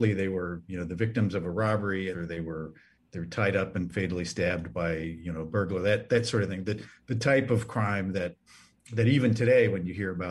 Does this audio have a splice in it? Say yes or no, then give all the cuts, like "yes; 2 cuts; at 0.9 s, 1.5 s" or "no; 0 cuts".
yes; 1 cut; at 2.1 s